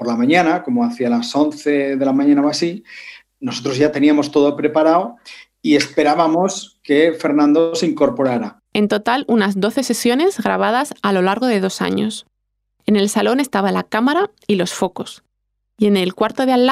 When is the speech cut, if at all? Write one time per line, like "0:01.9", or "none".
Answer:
0:08.7